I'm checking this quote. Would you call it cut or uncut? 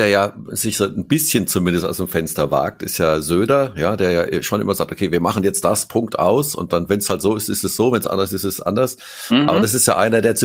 uncut